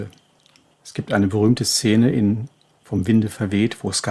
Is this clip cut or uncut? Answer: uncut